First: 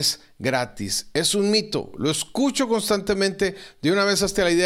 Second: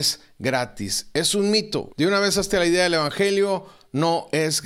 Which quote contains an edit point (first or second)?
second